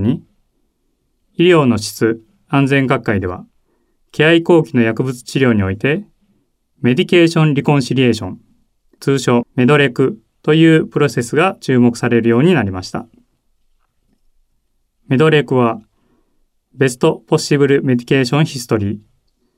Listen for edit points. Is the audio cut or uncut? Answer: uncut